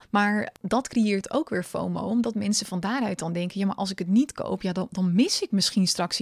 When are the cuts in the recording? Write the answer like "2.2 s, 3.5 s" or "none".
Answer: none